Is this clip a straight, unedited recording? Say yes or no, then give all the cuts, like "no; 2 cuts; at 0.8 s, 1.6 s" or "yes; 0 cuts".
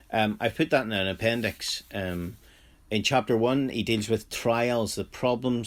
yes; 0 cuts